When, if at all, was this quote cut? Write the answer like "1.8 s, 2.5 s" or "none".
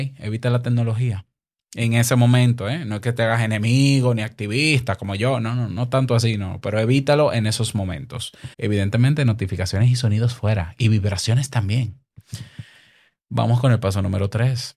8.5 s